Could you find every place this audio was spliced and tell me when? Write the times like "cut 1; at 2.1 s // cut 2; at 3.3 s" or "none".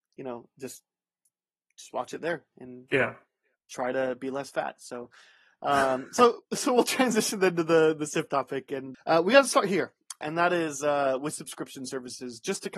cut 1; at 8.9 s // cut 2; at 10.2 s